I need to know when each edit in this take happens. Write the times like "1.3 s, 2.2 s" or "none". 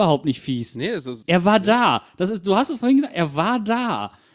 1.2 s